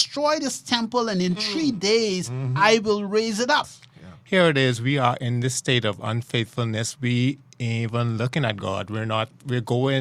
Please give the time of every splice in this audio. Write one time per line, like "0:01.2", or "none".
0:03.6